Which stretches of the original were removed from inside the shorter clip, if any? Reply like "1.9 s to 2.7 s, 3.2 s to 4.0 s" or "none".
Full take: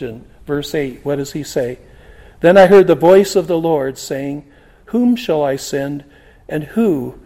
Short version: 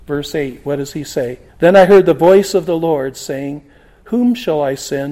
1.9 s to 2.3 s

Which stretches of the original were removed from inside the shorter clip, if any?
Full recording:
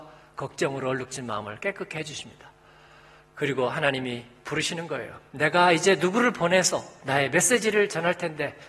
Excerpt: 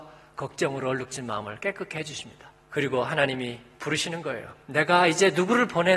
2.6 s to 3.3 s

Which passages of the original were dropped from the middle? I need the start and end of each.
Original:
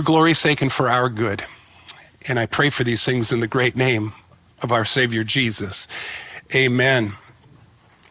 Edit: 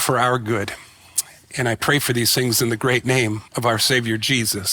4.2 s to 4.5 s

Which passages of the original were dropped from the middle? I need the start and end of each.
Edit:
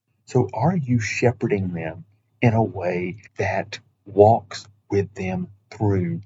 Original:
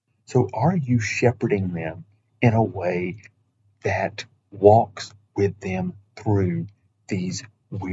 3.3 s to 3.7 s

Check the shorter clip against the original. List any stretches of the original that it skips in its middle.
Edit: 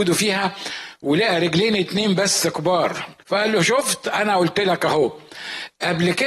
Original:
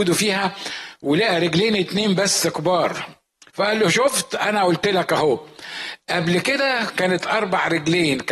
3.2 s to 3.5 s

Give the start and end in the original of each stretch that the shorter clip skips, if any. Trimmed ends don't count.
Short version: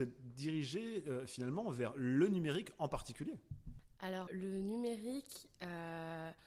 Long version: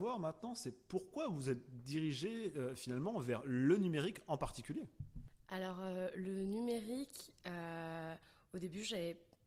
5.8 s to 6.1 s

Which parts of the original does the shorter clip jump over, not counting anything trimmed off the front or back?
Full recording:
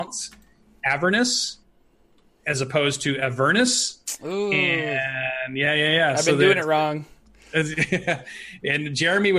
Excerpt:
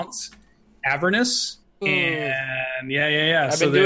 1.8 s to 4.5 s

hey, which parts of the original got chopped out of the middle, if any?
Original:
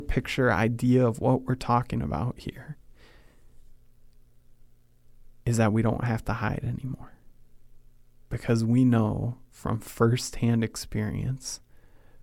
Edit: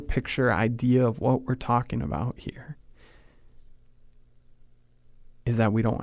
none

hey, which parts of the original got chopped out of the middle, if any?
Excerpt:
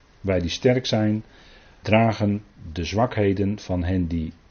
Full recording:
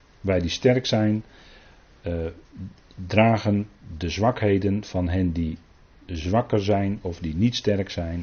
1.8 s to 3.1 s

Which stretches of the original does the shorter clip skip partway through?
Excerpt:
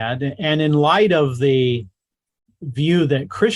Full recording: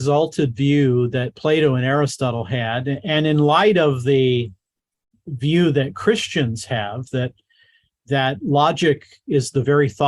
none

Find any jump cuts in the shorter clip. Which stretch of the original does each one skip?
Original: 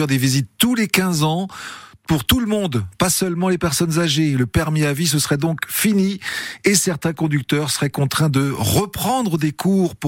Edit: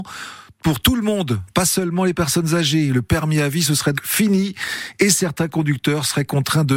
5.4 s to 5.6 s

